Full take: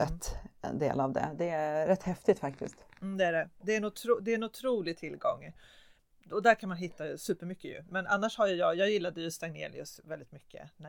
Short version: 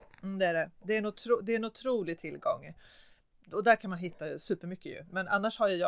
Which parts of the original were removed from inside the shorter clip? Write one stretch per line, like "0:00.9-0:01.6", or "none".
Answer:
none